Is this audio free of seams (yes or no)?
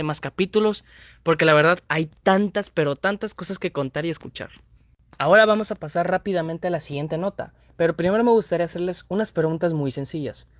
yes